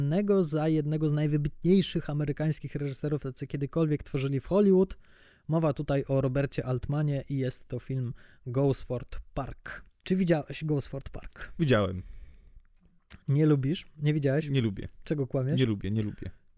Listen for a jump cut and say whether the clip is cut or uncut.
uncut